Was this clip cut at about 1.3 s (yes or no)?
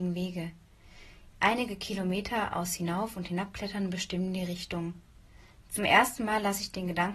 yes